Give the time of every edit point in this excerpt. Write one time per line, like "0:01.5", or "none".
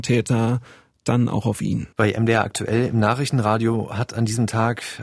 0:01.9